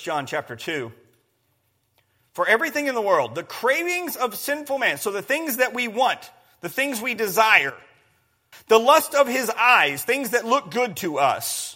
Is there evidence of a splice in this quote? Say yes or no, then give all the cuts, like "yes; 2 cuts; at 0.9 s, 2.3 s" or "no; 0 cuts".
yes; 1 cut; at 8.5 s